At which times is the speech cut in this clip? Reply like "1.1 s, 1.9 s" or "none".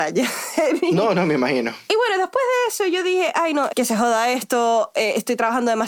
1.9 s, 3.7 s